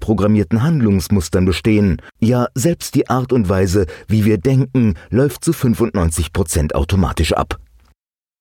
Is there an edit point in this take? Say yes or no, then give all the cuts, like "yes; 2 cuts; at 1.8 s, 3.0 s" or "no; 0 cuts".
yes; 1 cut; at 2.2 s